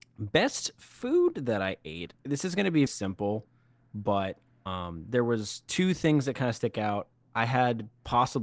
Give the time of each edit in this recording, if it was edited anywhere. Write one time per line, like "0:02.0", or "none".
0:02.9